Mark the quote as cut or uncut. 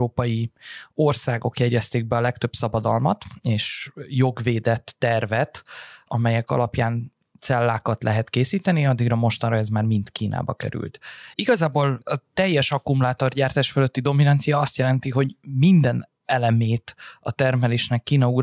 cut